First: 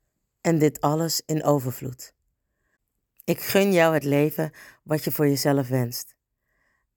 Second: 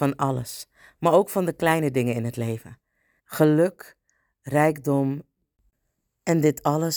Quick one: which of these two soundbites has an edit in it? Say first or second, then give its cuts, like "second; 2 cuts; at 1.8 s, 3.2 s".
second; 1 cut; at 3.2 s